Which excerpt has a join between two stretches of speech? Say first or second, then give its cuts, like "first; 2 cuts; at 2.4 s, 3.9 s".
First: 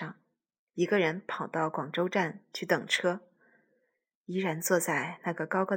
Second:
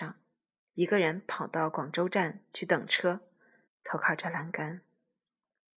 second; 1 cut; at 3.7 s